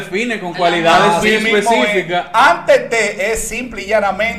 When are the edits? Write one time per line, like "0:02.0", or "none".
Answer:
0:01.2